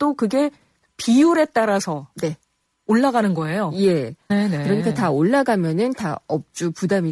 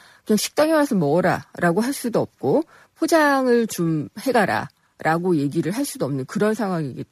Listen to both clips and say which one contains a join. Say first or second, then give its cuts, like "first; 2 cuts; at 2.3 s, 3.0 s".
first; 1 cut; at 4.3 s